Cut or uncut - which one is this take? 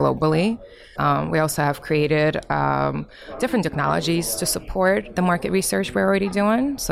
cut